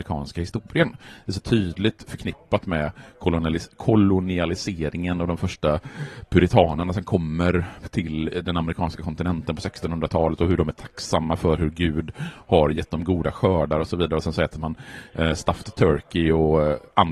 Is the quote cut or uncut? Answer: uncut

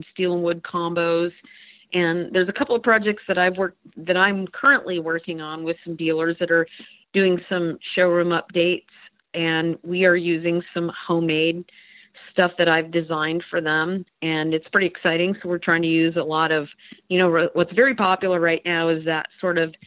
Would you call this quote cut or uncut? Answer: cut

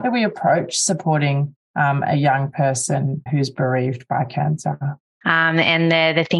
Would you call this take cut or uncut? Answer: cut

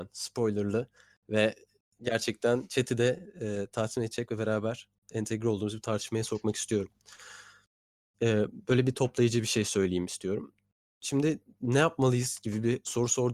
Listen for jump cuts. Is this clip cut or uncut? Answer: uncut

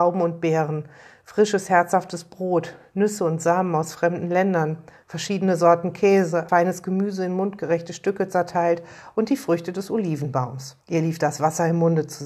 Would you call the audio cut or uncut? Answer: cut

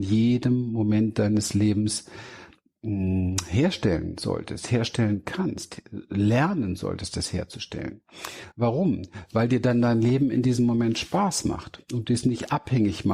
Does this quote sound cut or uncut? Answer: uncut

